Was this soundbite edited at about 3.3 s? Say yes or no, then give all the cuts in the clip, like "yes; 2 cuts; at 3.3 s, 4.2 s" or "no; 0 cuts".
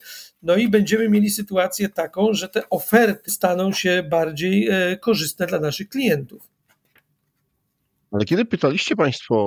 yes; 1 cut; at 3.3 s